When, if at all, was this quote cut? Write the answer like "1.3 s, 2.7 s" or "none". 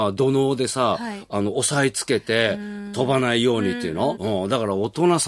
4.1 s

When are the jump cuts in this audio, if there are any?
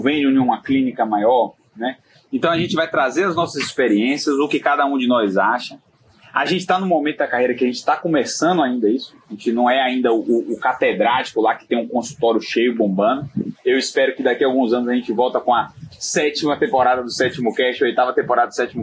none

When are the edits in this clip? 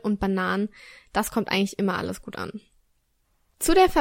none

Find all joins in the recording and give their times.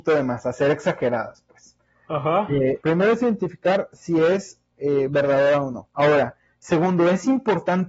2.8 s

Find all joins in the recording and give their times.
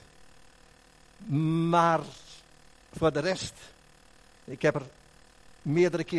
none

